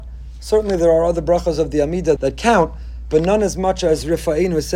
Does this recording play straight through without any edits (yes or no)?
no